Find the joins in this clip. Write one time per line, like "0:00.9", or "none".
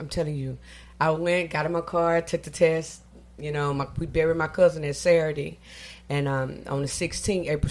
none